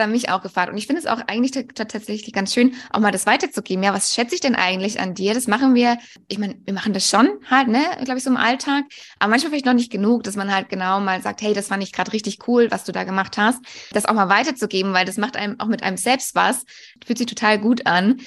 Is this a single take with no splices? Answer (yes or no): yes